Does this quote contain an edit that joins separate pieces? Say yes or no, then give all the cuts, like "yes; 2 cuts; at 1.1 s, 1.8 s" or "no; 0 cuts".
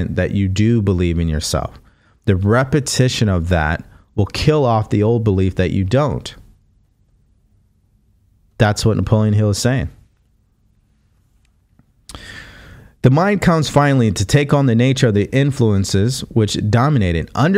no; 0 cuts